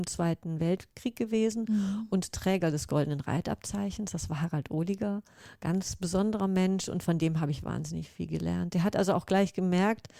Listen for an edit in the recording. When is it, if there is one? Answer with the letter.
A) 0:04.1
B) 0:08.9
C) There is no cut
C